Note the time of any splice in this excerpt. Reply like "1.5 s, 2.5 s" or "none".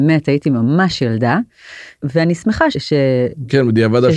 2.7 s